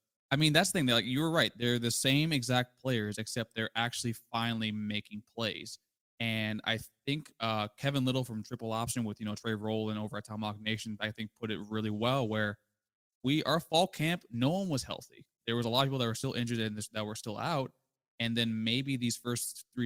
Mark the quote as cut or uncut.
uncut